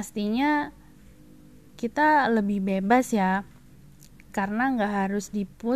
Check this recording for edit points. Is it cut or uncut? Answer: cut